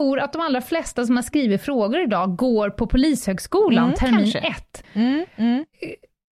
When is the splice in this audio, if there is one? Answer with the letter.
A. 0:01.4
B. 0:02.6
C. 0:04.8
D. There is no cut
C